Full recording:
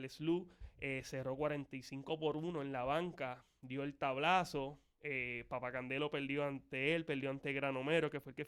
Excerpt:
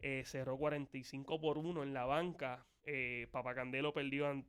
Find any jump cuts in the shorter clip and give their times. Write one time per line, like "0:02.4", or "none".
0:02.8